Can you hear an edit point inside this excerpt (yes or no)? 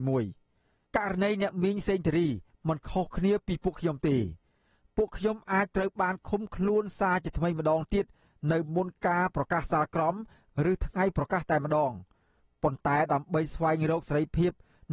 no